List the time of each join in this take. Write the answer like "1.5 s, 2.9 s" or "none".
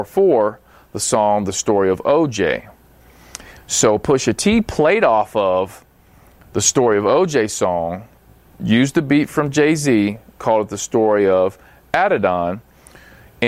none